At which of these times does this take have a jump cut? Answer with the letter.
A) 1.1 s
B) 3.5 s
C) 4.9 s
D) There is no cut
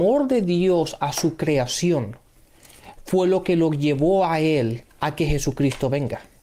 C